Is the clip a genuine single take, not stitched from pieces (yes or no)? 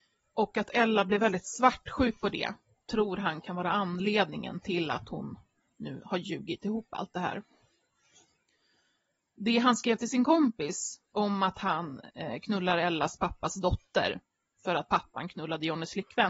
yes